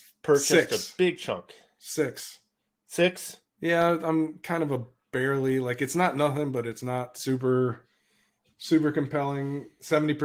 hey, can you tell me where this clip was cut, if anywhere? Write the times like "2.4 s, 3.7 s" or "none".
none